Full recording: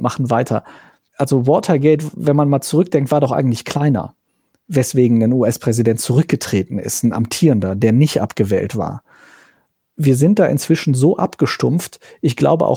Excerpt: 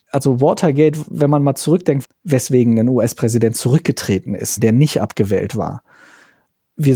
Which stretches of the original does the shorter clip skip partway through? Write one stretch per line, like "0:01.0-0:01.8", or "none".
0:03.1-0:04.5
0:07.0-0:07.8

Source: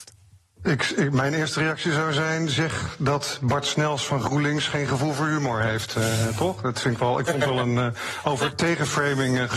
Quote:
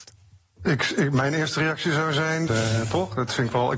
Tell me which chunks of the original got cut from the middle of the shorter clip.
0:02.5-0:05.9

